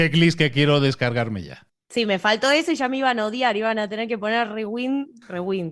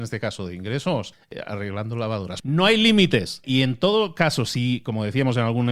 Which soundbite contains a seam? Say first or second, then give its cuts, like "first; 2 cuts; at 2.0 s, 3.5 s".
second; 2 cuts; at 2.4 s, 3.4 s